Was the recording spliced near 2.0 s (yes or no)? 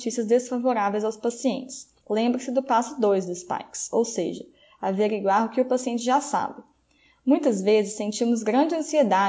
yes